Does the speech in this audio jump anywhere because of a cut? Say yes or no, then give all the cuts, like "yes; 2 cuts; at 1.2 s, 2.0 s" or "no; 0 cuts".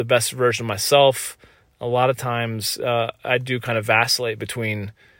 no; 0 cuts